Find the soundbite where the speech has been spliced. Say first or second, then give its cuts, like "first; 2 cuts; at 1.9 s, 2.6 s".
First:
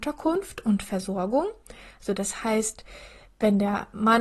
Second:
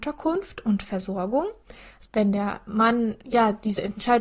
second; 2 cuts; at 2.1 s, 3.2 s